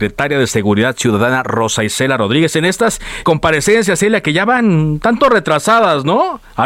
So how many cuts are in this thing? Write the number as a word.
one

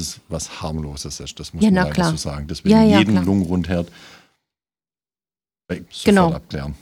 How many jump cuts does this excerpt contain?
one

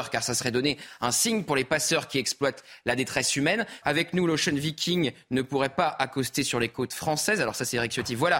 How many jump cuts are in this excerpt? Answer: one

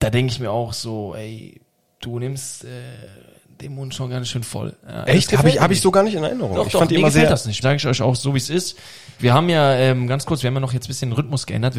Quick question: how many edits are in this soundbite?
two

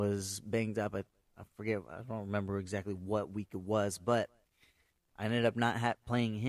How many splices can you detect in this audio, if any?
zero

